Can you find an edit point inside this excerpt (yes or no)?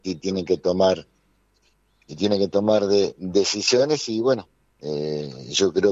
no